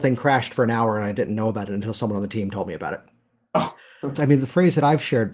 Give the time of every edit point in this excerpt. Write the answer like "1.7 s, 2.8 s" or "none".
4.2 s